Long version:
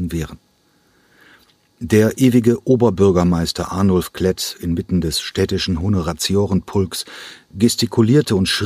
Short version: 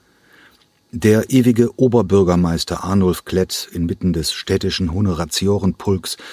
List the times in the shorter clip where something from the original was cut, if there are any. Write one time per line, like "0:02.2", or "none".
none